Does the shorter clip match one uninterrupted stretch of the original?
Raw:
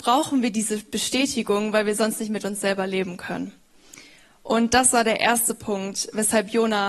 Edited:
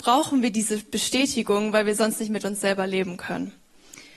yes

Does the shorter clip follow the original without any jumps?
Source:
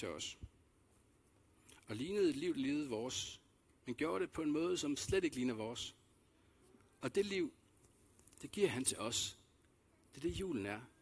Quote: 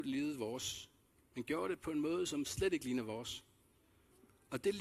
yes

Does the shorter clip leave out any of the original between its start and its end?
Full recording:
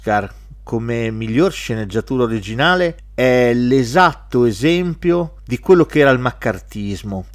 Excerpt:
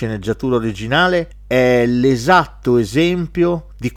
no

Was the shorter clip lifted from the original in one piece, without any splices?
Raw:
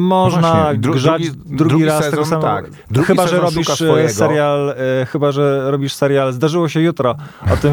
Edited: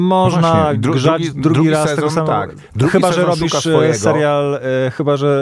no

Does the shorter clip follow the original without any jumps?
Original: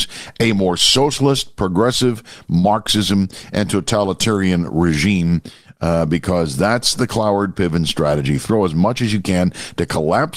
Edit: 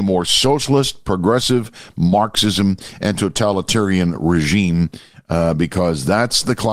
yes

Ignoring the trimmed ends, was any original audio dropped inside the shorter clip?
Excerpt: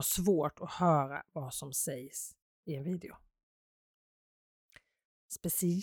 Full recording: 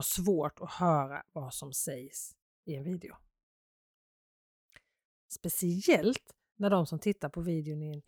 no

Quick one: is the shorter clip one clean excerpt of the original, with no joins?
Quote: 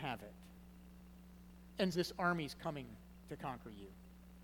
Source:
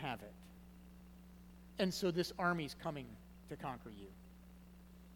no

